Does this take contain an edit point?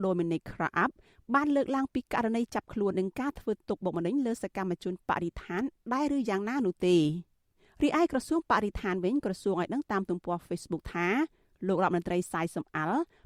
yes; 1 cut; at 2.9 s

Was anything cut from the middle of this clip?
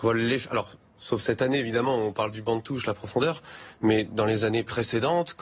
no; 0 cuts

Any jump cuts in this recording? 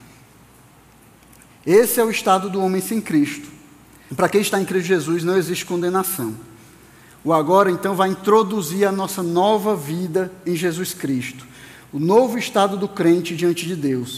yes; 1 cut; at 4.1 s

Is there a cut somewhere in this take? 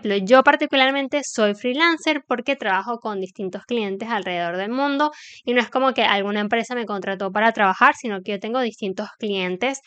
no; 0 cuts

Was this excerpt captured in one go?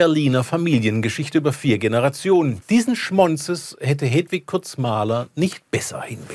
no; 1 cut; at 2.6 s

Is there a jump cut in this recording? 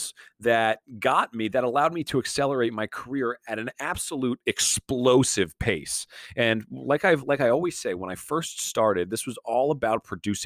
no; 0 cuts

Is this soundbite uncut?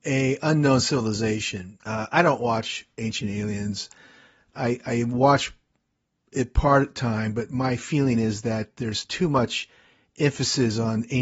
no; 1 cut; at 1.8 s

